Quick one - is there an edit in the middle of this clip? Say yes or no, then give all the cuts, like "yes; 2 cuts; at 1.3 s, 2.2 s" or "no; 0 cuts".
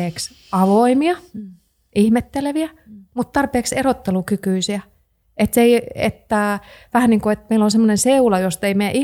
no; 0 cuts